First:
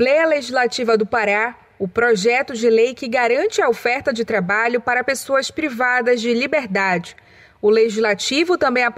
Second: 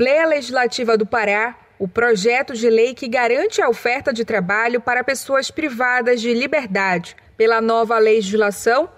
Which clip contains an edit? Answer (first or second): second